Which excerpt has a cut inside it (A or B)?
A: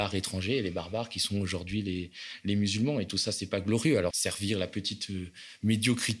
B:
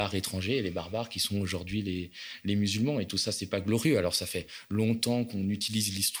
A